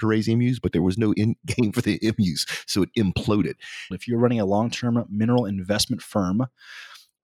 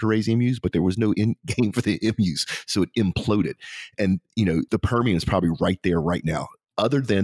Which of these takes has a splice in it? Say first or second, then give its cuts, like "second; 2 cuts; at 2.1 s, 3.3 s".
first; 1 cut; at 3.9 s